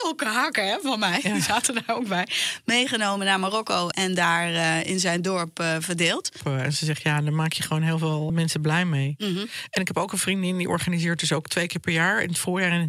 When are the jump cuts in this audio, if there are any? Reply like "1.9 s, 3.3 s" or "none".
6.4 s